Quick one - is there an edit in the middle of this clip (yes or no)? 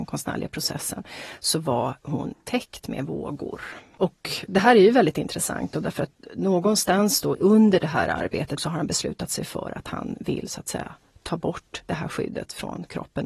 yes